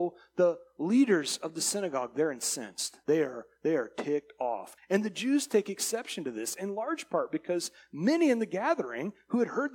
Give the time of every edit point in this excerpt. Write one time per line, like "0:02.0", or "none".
0:03.0
0:04.8